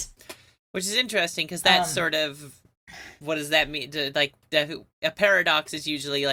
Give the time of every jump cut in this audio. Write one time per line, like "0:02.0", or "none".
none